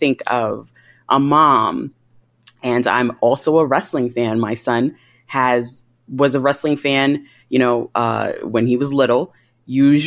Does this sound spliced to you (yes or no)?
no